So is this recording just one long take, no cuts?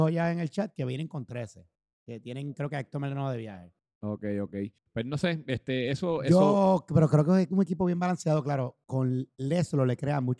yes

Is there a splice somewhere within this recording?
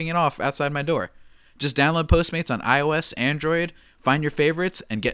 no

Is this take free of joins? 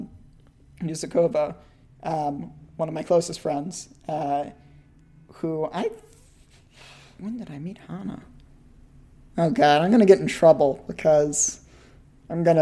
yes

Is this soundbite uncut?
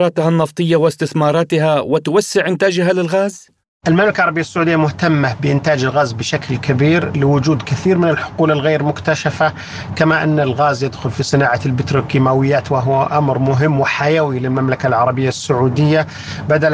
yes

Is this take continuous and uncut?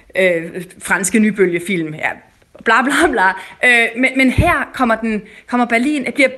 yes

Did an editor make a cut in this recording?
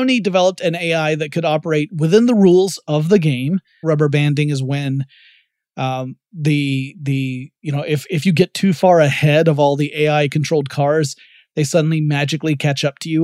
yes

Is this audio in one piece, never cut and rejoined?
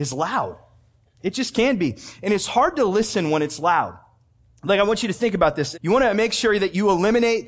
no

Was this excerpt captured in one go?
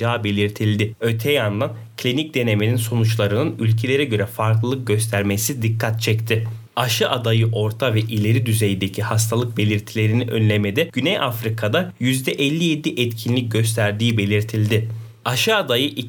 no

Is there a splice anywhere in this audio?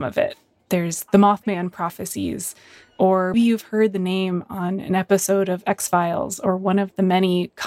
yes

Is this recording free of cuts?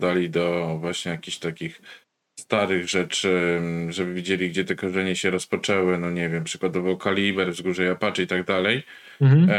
yes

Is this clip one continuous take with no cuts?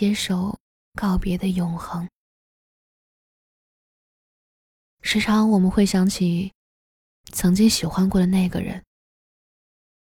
yes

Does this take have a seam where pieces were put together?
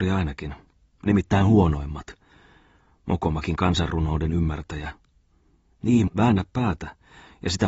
yes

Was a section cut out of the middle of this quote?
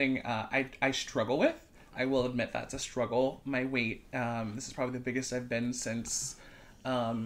no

